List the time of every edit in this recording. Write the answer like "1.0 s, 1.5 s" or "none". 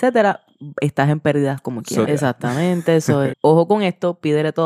2.1 s, 3.3 s